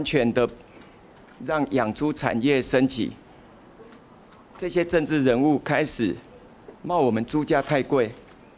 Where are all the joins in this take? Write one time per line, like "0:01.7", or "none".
0:04.5
0:06.8